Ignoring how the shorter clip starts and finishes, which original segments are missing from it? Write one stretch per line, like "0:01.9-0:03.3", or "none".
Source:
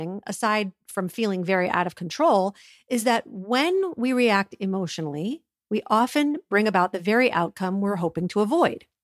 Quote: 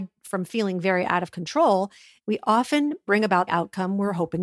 0:02.8-0:05.6
0:06.9-0:07.3